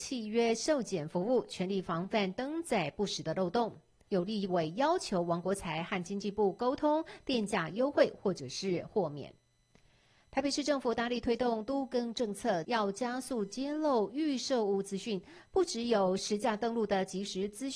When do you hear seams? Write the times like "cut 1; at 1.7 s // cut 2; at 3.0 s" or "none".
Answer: cut 1; at 4.1 s // cut 2; at 12.6 s